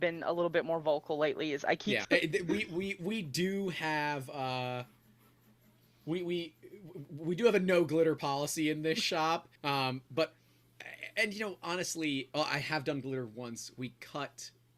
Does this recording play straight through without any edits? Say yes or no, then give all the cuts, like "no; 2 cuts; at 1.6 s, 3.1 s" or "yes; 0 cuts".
no; 3 cuts; at 2.0 s, 9.6 s, 12.3 s